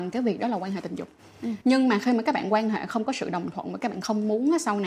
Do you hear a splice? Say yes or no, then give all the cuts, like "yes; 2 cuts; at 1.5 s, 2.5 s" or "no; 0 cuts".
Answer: no; 0 cuts